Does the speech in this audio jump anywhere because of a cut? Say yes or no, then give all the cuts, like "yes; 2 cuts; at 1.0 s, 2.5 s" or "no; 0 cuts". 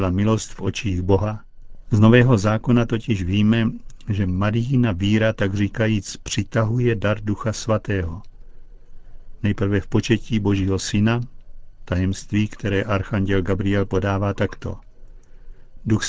no; 0 cuts